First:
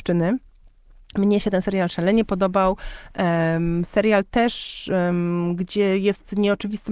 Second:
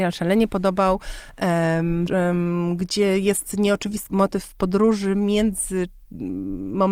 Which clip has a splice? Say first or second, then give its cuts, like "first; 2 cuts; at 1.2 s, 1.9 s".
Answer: second; 2 cuts; at 2.1 s, 4.1 s